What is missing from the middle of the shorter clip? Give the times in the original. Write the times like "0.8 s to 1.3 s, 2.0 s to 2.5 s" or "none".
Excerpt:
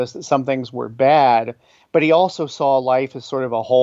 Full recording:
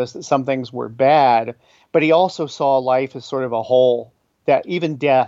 none

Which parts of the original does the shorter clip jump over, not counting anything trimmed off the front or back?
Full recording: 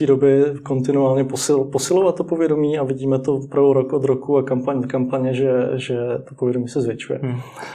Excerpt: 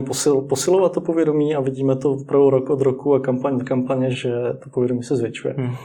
5.4 s to 5.8 s

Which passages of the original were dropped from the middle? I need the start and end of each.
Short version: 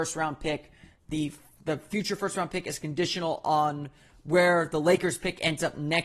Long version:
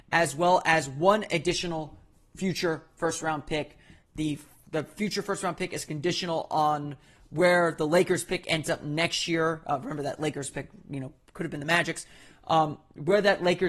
none

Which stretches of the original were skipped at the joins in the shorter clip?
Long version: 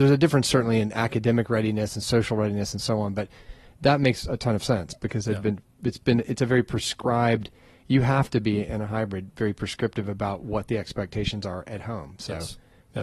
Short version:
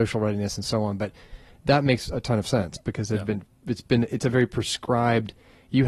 none

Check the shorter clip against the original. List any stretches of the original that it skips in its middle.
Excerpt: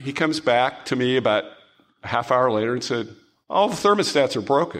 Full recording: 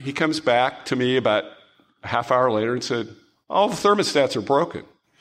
none

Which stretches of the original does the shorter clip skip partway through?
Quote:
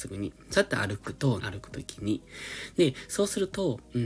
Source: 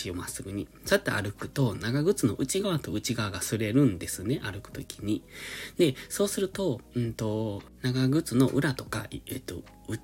1.7 s to 4.4 s

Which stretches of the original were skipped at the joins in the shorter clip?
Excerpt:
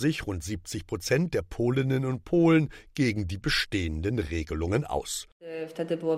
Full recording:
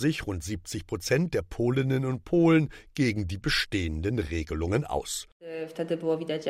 none

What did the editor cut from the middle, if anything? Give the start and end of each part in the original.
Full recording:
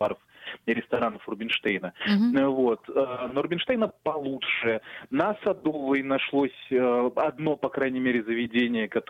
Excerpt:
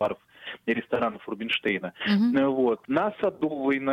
2.8 s to 5.1 s

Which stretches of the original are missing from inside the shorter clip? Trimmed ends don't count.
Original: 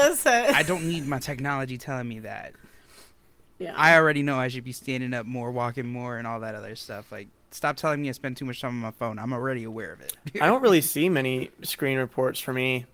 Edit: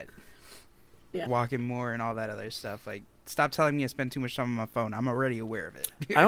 3.7 s to 5.5 s

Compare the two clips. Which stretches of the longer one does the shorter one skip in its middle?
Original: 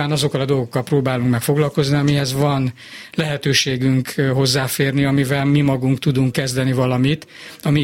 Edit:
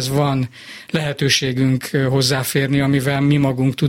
none

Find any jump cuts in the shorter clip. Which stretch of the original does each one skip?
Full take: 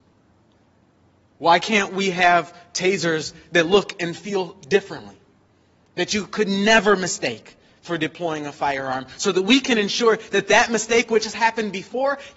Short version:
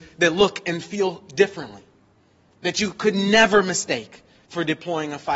none

